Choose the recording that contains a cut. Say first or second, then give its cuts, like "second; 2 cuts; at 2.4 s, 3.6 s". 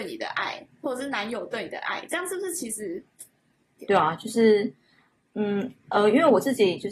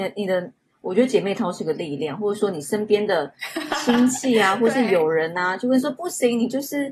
first; 1 cut; at 3.8 s